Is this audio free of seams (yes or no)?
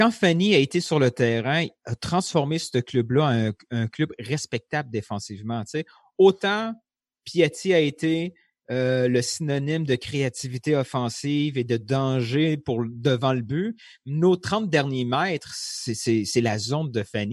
yes